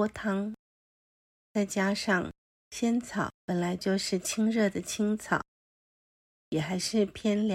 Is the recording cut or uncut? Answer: cut